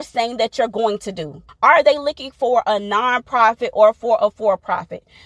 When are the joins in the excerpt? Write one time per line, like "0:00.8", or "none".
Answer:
0:01.5